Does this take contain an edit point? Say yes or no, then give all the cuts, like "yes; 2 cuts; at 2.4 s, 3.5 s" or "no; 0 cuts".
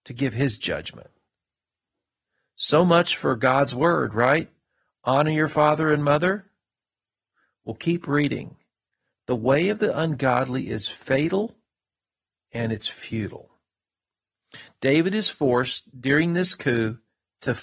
no; 0 cuts